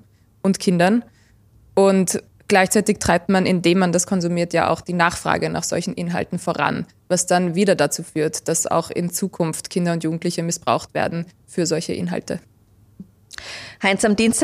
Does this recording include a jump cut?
no; 0 cuts

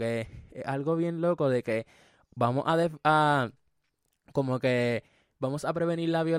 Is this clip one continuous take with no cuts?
yes; 0 cuts

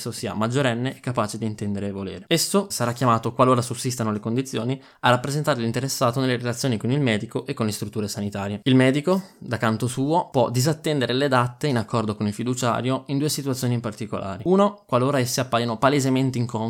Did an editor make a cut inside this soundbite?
yes; 1 cut; at 2.7 s

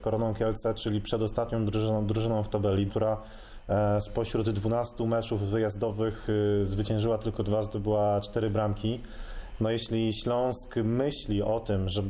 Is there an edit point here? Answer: yes; 1 cut; at 2.9 s

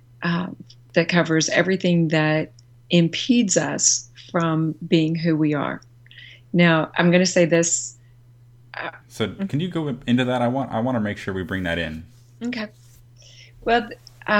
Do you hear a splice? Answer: yes; 2 cuts; at 6.9 s, 9.0 s

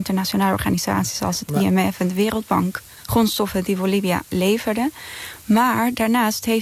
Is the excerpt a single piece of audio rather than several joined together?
no; 1 cut; at 3.0 s

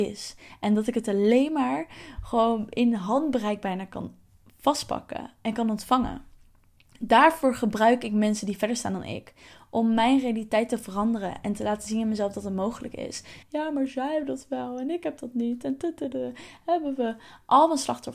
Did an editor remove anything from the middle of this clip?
yes; 1 cut; at 13.4 s

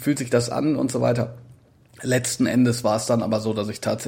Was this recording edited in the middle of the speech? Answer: no; 0 cuts

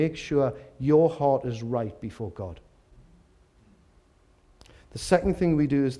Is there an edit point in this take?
no; 0 cuts

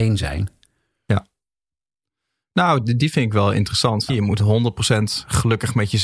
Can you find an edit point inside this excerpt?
yes; 1 cut; at 4.1 s

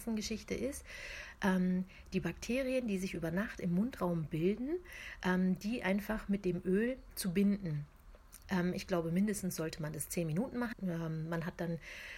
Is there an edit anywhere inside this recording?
yes; 2 cuts; at 8.4 s, 10.7 s

